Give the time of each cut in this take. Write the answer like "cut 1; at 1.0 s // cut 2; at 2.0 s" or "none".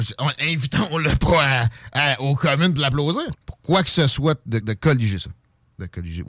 cut 1; at 3.3 s // cut 2; at 4.6 s